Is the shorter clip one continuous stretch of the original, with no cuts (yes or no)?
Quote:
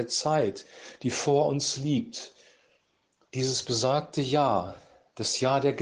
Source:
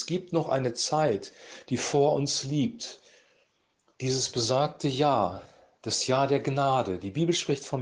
yes